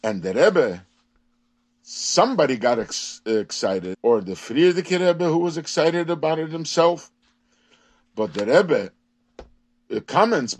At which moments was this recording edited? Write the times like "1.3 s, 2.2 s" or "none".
3.9 s